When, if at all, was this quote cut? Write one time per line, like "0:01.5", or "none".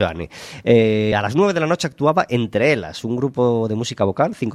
none